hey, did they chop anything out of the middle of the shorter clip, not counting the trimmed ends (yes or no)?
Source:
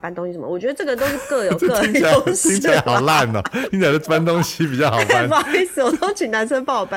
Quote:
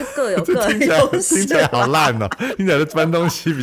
no